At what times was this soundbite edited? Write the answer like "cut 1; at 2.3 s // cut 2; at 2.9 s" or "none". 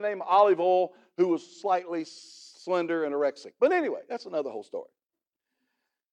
none